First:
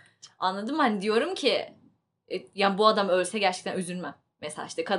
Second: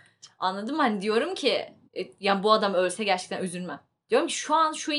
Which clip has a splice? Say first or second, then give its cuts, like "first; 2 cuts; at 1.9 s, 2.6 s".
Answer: second; 2 cuts; at 1.9 s, 4.0 s